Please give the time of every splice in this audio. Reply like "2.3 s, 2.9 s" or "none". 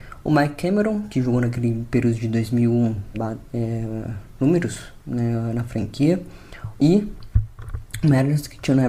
3.1 s, 6.8 s

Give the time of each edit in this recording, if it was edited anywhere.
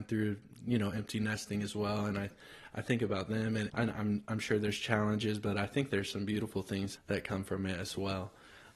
3.7 s, 7.0 s

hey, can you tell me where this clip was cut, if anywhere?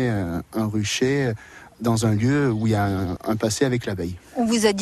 3.2 s

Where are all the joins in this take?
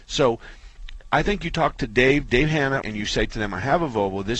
2.8 s

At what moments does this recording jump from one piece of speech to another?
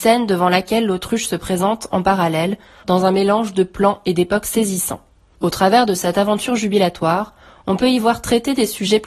2.8 s, 5.3 s

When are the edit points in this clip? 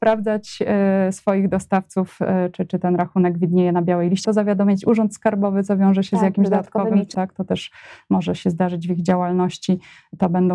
4.2 s, 7.1 s

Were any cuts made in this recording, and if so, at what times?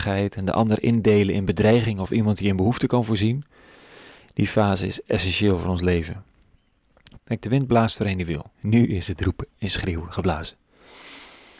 7.2 s, 8.5 s

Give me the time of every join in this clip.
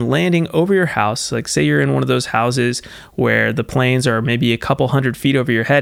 none

